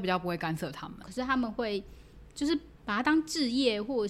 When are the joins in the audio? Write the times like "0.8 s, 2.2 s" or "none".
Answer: 1.0 s